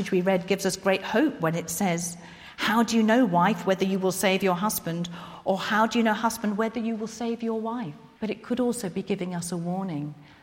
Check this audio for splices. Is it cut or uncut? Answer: cut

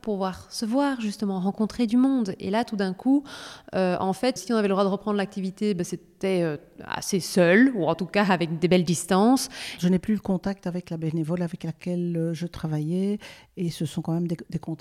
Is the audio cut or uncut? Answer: cut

